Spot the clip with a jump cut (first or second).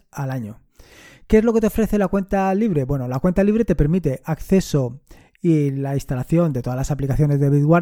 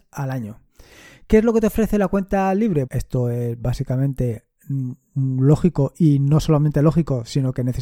second